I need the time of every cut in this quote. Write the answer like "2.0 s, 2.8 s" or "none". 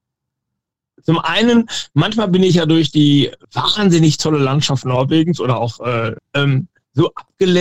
0.9 s, 3.4 s, 6.2 s